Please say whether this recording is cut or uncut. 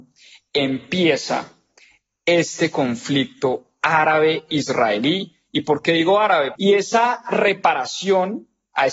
cut